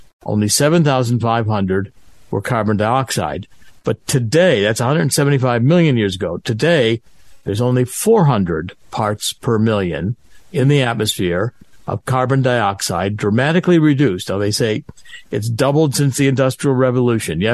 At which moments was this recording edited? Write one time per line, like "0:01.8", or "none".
none